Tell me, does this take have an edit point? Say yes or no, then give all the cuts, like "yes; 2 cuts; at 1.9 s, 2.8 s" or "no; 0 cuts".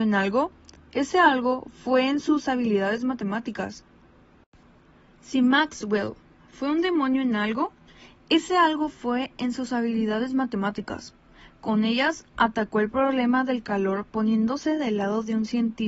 no; 0 cuts